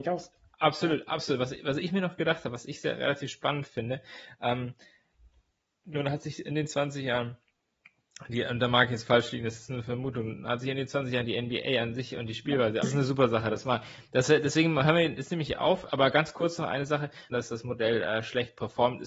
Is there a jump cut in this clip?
yes; 2 cuts; at 12.8 s, 17.3 s

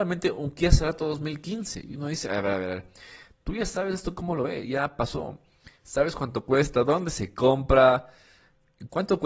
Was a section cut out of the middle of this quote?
no; 0 cuts

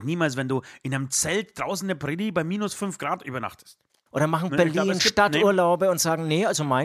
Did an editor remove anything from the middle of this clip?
yes; 1 cut; at 4.1 s

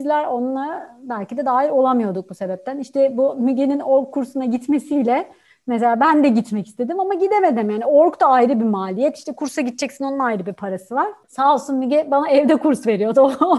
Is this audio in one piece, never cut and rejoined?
no; 1 cut; at 11.2 s

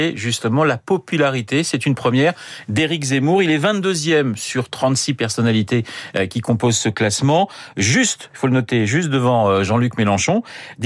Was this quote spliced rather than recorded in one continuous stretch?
no; 0 cuts

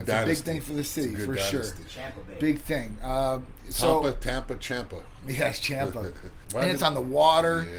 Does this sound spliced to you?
yes; 1 cut; at 6.4 s

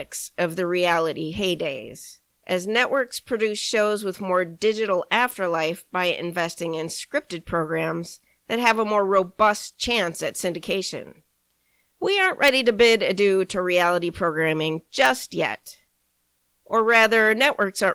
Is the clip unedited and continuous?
yes; 0 cuts

